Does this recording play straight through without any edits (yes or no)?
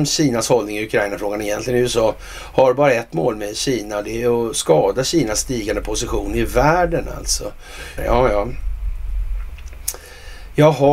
no